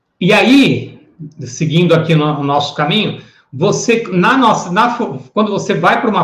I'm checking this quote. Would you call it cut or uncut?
uncut